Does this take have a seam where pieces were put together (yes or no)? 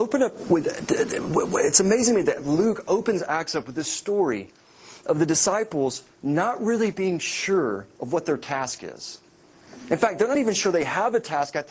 no